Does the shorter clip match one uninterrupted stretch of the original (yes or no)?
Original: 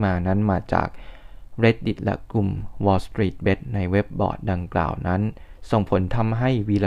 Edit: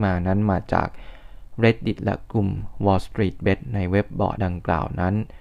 no